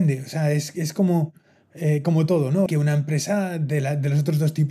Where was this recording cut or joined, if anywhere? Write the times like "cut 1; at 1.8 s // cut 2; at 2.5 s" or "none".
cut 1; at 2.7 s